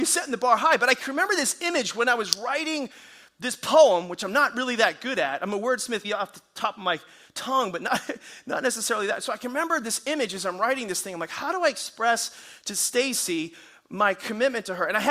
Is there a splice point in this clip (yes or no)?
yes